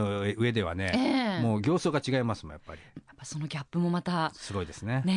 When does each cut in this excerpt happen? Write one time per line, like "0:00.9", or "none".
0:03.0